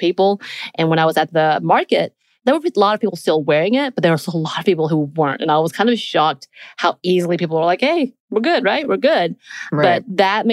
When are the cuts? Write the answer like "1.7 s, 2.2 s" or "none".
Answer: none